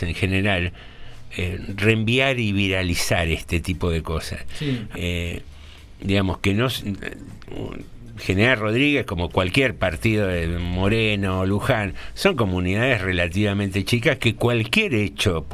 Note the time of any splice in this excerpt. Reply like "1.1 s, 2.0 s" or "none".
4.9 s, 14.2 s